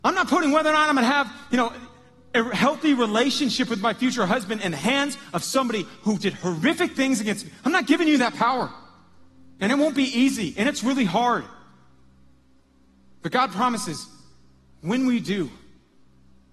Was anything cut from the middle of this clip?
no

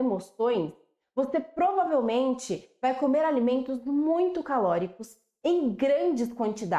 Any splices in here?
no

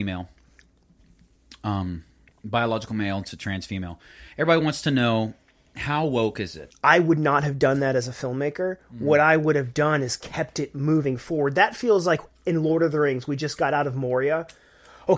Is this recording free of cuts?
no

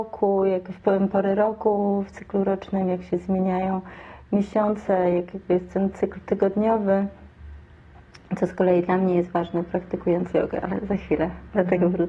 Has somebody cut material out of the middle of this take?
no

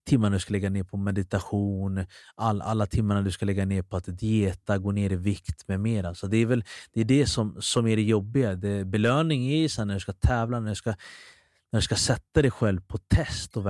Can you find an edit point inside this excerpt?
no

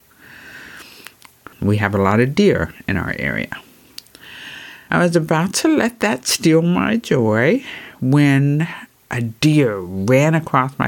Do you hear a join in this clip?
yes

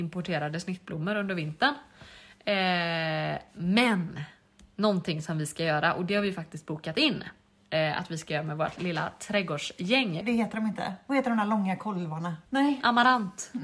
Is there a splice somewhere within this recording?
yes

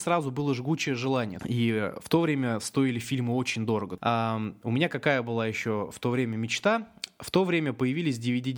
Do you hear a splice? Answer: yes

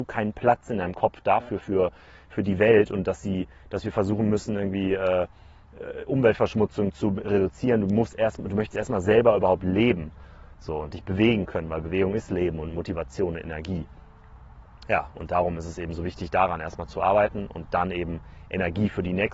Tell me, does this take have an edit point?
no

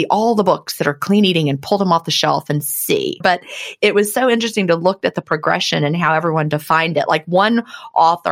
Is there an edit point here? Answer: yes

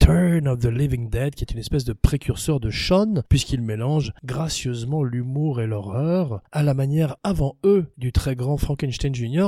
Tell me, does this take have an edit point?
no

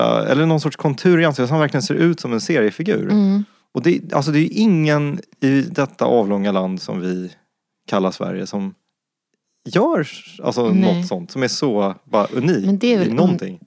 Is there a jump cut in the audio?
no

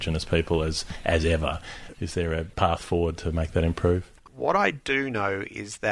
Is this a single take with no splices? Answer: no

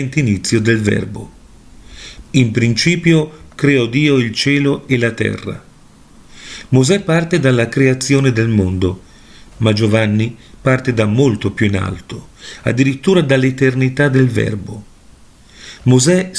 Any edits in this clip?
yes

